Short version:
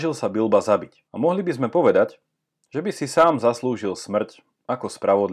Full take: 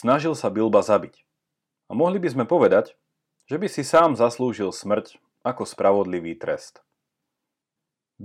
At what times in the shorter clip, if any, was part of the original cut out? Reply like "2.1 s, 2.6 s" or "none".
1.1 s